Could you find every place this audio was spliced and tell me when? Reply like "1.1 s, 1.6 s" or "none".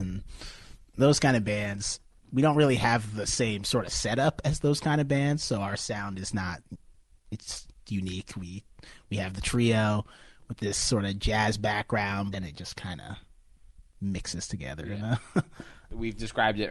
12.3 s, 13.9 s

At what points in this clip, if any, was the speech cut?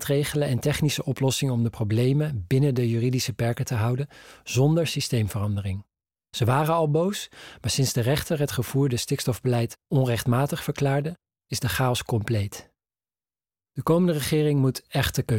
6.1 s, 13.6 s

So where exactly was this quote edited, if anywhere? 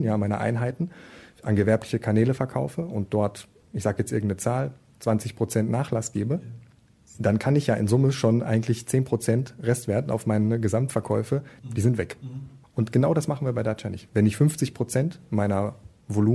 11.6 s, 14.1 s

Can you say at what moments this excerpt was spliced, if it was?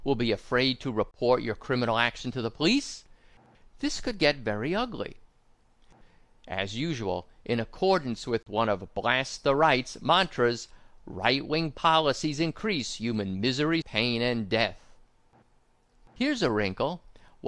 13.8 s

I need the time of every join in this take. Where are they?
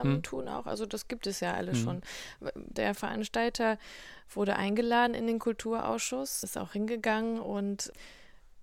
2.7 s

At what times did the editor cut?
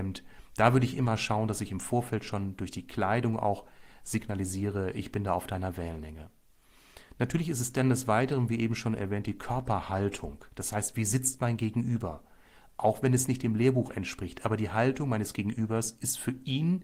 none

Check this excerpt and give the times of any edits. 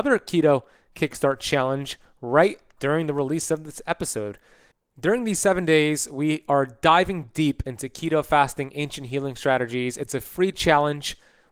2.8 s

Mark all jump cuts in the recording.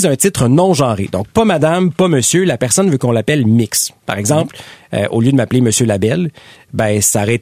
none

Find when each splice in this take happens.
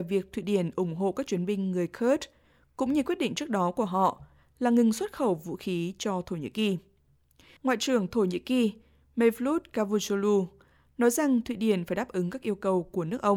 7.6 s

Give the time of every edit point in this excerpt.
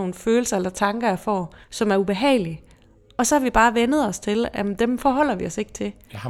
1.6 s

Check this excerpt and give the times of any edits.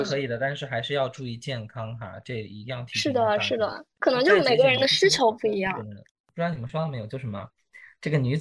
3.9 s

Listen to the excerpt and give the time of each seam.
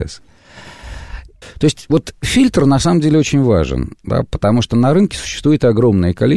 1.4 s

